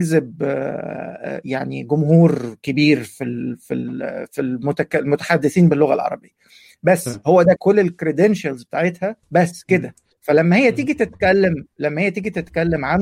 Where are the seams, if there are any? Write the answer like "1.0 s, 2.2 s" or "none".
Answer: 7.6 s, 9.2 s